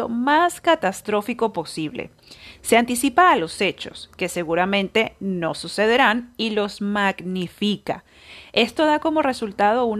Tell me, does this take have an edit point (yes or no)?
no